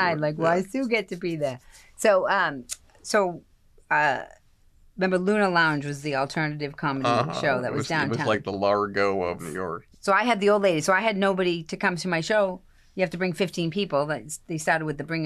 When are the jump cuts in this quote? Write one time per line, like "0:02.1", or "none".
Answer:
0:09.9